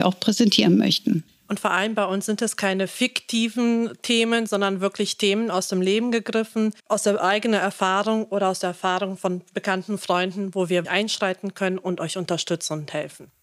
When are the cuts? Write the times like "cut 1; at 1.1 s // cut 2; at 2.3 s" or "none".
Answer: cut 1; at 6.8 s // cut 2; at 10.8 s